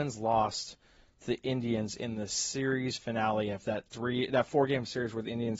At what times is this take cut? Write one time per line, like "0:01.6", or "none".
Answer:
none

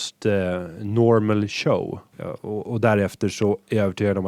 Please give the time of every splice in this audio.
0:02.1

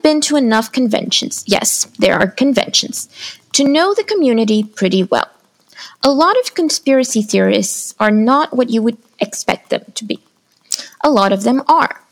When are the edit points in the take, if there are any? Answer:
none

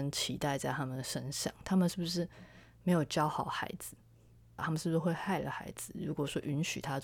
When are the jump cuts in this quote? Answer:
0:04.6

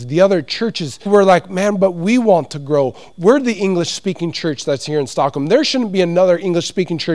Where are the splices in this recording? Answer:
0:01.1

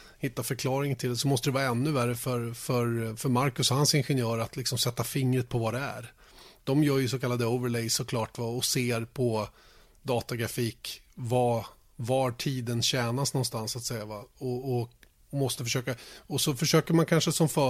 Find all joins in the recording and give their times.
none

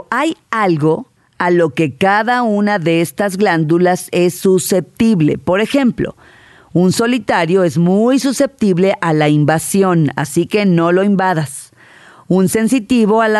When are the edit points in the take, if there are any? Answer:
none

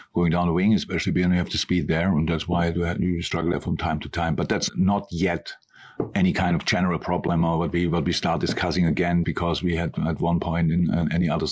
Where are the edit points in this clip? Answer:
0:04.7
0:09.2

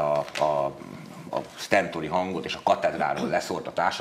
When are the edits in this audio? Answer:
0:01.3

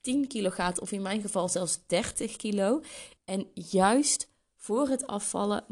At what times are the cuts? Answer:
0:03.2

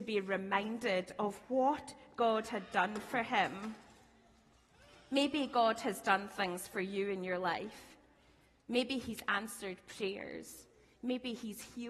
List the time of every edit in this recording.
none

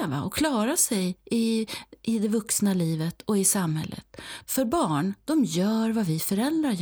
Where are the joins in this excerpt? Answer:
0:04.4

